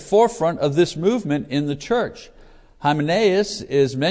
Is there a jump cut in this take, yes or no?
no